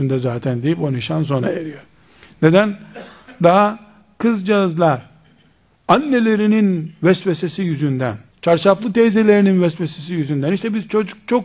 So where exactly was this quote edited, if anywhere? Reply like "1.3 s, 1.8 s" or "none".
8.3 s

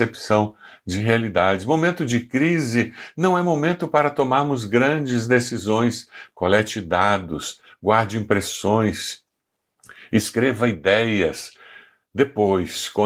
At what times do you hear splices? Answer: none

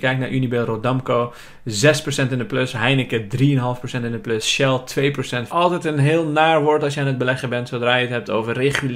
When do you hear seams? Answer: 5.5 s

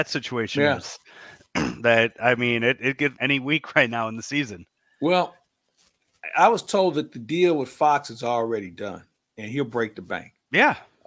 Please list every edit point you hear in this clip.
3.1 s

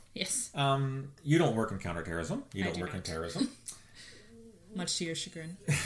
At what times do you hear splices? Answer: none

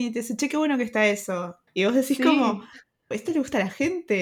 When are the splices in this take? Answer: 1.7 s, 3.1 s

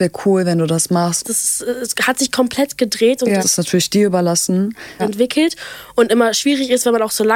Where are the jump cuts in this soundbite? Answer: 1.2 s, 3.4 s, 5.0 s

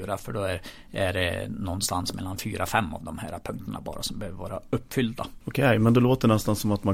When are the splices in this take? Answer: 5.4 s

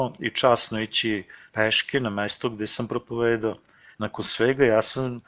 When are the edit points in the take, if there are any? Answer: none

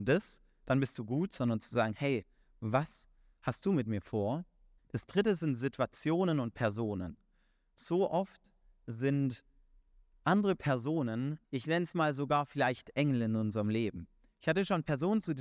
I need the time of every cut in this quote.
4.8 s, 11.4 s

